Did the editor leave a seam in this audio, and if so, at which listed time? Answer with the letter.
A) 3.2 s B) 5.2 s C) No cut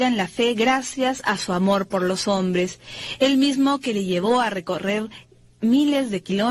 C